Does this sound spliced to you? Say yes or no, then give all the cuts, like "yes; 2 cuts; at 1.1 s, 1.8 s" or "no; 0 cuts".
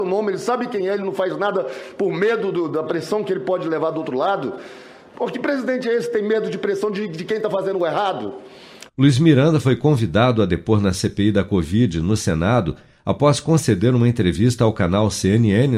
yes; 1 cut; at 8.9 s